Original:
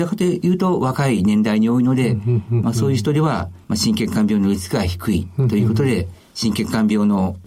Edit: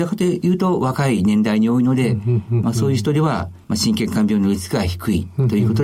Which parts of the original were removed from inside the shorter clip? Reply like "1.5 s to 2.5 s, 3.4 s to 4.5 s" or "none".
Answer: none